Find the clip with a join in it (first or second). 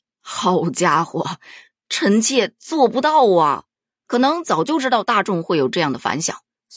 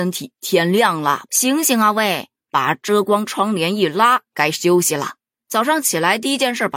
second